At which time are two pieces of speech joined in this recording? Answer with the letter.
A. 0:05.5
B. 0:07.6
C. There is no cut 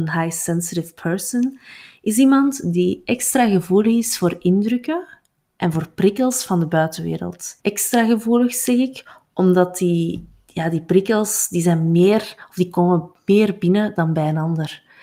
B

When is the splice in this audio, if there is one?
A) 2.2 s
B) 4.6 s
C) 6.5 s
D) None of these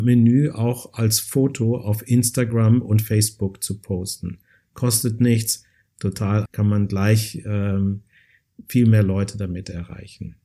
C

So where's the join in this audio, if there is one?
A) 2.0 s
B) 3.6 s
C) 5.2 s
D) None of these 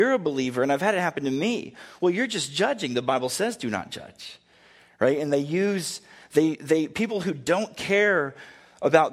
D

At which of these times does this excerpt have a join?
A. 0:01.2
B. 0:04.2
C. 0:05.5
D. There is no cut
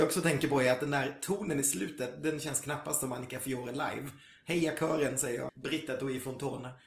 C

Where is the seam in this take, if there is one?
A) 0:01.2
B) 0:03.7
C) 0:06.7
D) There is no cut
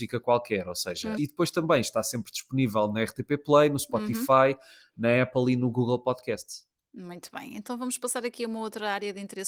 A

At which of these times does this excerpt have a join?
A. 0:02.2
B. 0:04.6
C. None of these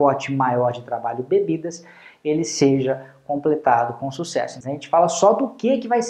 B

